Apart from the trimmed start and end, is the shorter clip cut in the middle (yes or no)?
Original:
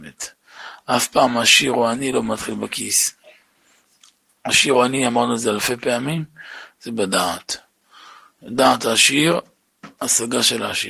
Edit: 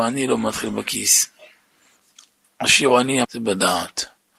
yes